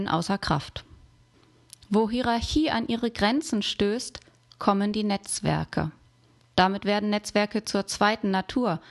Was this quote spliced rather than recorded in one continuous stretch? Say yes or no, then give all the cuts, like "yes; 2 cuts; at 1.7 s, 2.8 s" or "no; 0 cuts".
no; 0 cuts